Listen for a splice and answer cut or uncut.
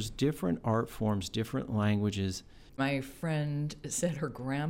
cut